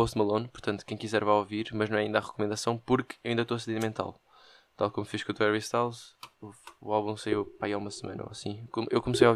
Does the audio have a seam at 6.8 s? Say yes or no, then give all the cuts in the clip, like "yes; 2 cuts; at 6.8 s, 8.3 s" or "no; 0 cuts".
no; 0 cuts